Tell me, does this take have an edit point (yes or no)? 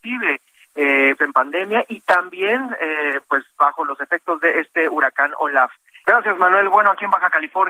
yes